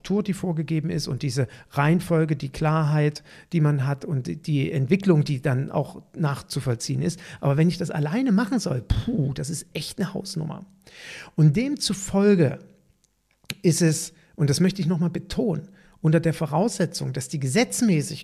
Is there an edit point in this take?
no; 0 cuts

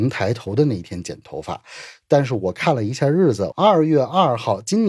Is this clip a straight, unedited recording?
no; 1 cut; at 3.5 s

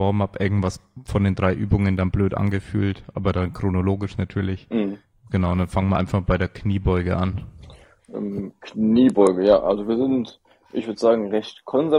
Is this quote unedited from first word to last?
yes; 0 cuts

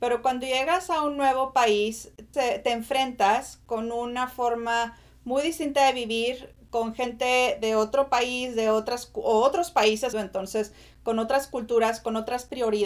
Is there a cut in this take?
yes; 2 cuts; at 2.3 s, 10.1 s

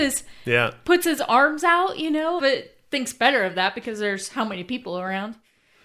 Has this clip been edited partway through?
yes; 1 cut; at 2.4 s

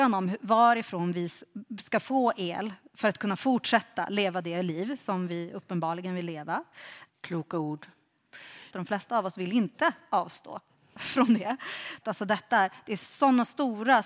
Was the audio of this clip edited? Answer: yes; 3 cuts; at 7.1 s, 8.7 s, 12.0 s

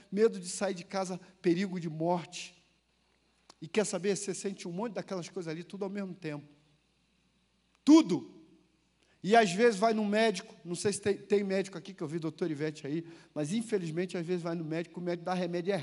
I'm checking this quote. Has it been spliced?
no; 0 cuts

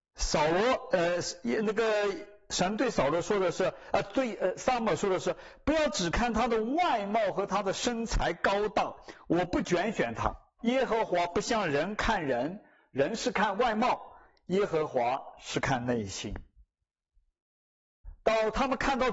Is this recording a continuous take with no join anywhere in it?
no; 1 cut; at 10.6 s

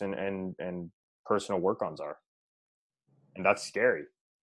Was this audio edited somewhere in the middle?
no; 0 cuts

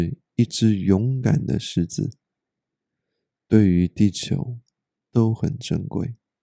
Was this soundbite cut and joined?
no; 0 cuts

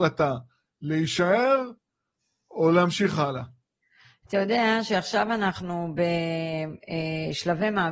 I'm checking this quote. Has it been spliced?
no; 0 cuts

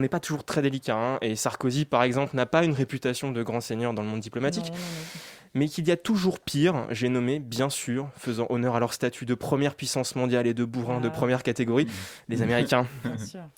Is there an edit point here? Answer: no; 0 cuts

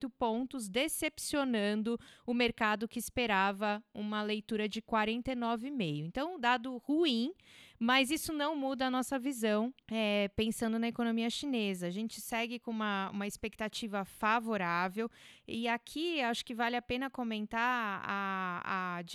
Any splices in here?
yes; 1 cut; at 9.8 s

